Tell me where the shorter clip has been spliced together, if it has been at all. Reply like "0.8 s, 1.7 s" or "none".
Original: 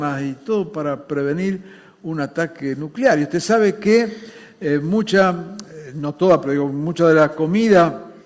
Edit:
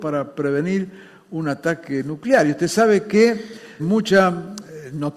3.8 s